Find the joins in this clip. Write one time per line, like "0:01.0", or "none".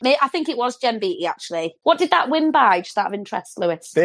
none